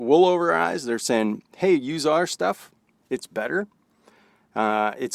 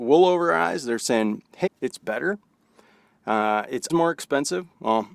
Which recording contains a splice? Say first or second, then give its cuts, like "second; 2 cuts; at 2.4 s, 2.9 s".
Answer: second; 2 cuts; at 1.7 s, 3.9 s